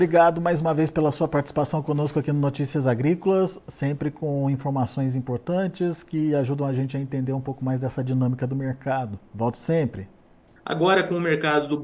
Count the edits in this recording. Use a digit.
1